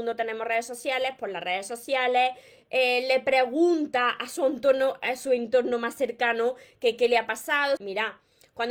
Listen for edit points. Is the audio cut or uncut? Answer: cut